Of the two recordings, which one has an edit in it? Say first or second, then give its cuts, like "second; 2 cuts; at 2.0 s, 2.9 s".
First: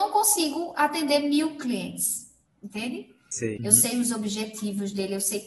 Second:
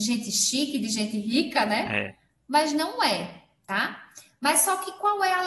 first; 2 cuts; at 2.5 s, 3.6 s